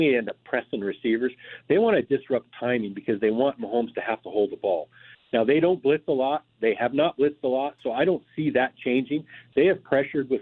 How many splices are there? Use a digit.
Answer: 0